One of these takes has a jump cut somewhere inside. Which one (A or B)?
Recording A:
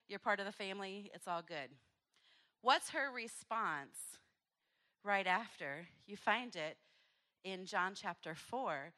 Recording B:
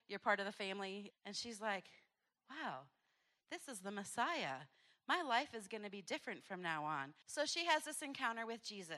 B